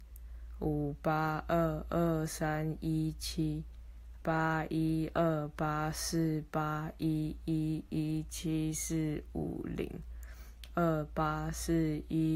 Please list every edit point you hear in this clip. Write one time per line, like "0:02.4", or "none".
0:04.2